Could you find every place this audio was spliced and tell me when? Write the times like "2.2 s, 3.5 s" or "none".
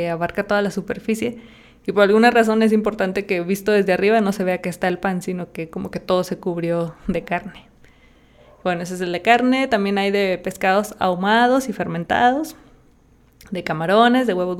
none